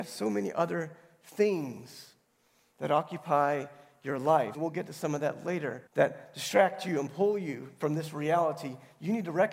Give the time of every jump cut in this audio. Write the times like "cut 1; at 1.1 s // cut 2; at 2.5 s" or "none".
cut 1; at 4.5 s // cut 2; at 5.9 s

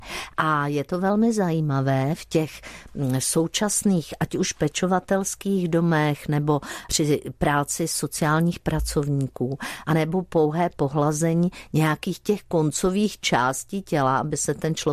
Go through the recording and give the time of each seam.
cut 1; at 6.9 s // cut 2; at 9.8 s

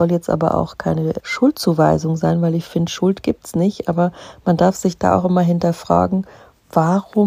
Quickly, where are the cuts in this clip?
cut 1; at 1.2 s

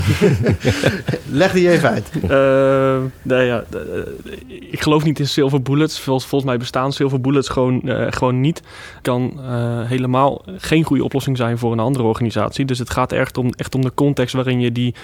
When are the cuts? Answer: cut 1; at 9.0 s

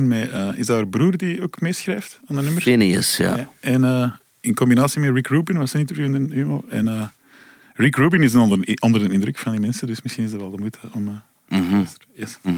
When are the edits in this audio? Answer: none

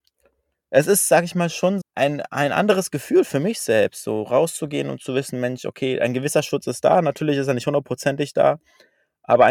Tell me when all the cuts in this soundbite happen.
cut 1; at 1.8 s

